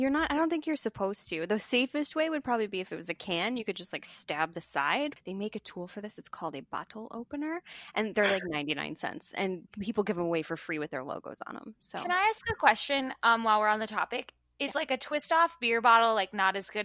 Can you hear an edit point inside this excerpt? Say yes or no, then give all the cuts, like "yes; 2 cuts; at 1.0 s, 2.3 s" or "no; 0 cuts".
yes; 1 cut; at 5.2 s